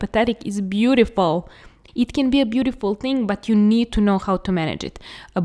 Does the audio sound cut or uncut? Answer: cut